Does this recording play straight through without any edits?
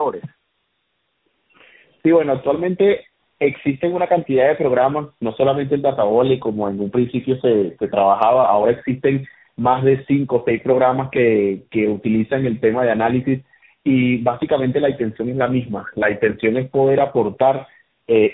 yes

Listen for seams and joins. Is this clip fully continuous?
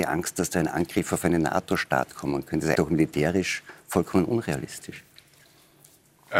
no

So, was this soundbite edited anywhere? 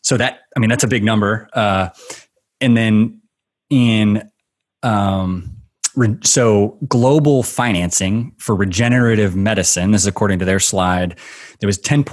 no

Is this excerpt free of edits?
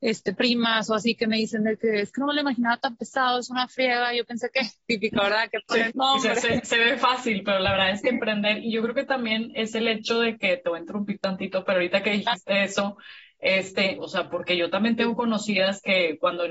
no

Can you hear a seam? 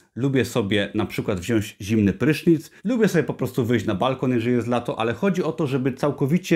yes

